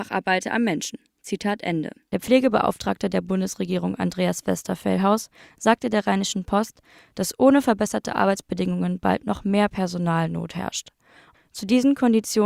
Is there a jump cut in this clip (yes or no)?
yes